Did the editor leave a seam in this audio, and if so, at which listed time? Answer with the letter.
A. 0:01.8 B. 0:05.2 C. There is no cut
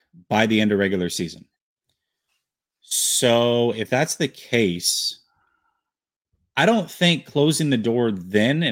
C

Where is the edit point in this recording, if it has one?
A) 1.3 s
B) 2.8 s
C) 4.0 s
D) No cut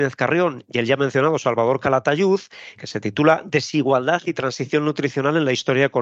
B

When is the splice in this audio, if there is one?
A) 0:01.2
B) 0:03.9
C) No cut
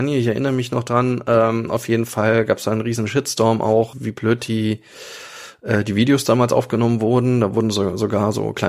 B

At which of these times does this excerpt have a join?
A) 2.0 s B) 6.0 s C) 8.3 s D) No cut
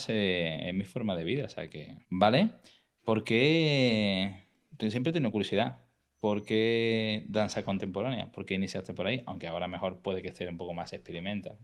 A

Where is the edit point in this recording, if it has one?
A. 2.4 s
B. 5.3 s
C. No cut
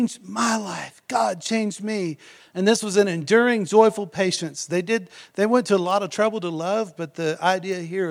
A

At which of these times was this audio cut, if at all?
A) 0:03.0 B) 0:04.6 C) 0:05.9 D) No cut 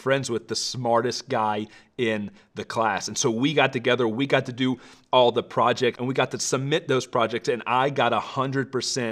C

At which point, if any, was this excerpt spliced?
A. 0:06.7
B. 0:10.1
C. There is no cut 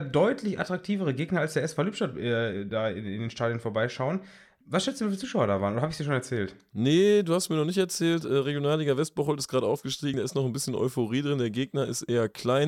C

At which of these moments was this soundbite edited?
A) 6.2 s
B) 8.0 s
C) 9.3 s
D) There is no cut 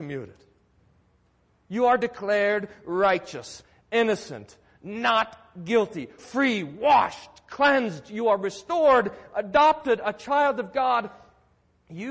A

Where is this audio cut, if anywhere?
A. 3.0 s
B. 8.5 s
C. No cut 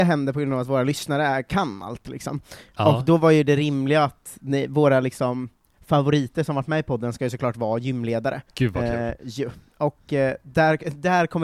B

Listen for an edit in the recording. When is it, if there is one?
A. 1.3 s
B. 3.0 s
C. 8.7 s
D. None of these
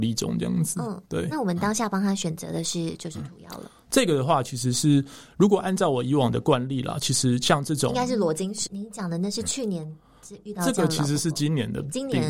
C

